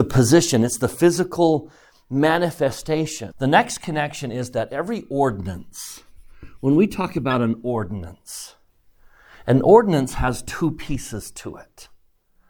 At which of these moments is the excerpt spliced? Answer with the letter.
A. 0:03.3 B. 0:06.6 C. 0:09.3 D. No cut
A